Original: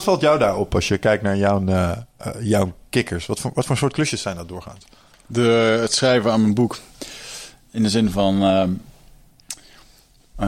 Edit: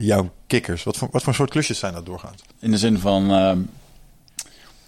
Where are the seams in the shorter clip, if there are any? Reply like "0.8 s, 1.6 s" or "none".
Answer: 2.5 s